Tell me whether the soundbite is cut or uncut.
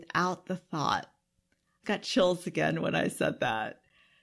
cut